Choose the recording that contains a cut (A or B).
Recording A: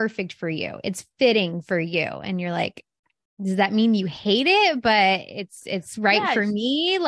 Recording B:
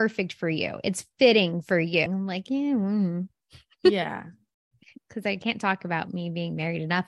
B